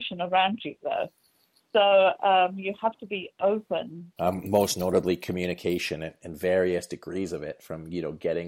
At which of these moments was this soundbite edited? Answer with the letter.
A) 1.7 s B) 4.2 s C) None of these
B